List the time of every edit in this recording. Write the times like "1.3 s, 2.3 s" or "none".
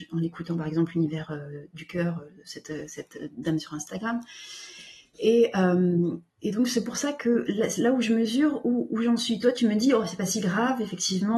6.3 s